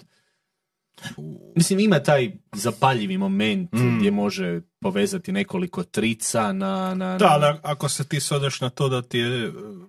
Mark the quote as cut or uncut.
cut